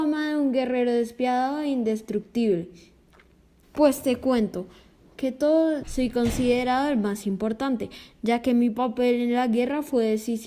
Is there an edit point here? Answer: yes; 2 cuts; at 3.6 s, 5.8 s

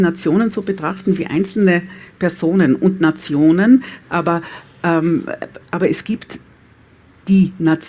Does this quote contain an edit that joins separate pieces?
yes; 1 cut; at 4.0 s

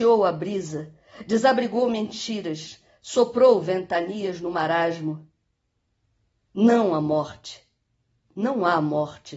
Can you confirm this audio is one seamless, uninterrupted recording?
yes; 0 cuts

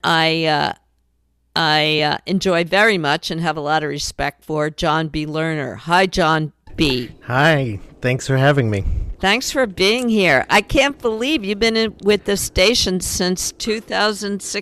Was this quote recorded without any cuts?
yes; 0 cuts

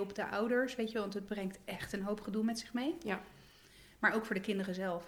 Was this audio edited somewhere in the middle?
yes; 1 cut; at 1.3 s

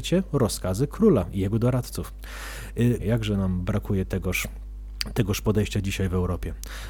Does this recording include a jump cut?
yes; 1 cut; at 3.0 s

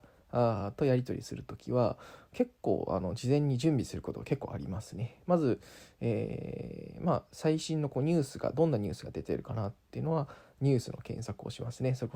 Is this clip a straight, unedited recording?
yes; 0 cuts

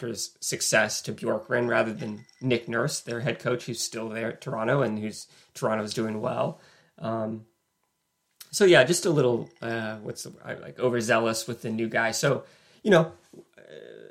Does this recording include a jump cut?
no; 0 cuts

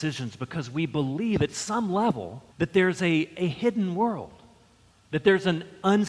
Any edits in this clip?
yes; 1 cut; at 2.5 s

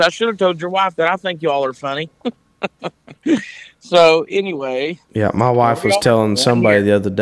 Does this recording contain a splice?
no; 0 cuts

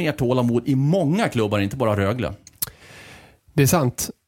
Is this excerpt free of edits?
yes; 0 cuts

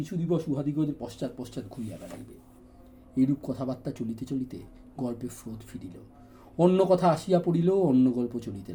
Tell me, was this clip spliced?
no; 0 cuts

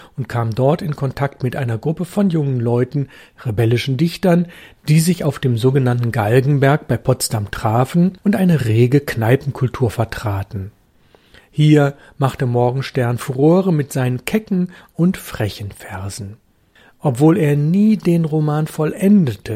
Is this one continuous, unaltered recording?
yes; 0 cuts

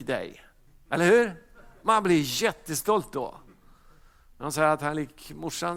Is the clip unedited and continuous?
yes; 0 cuts

